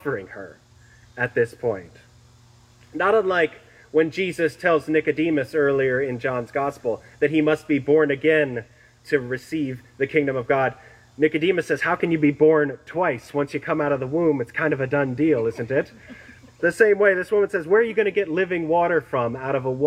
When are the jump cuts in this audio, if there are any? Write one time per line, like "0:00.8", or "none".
none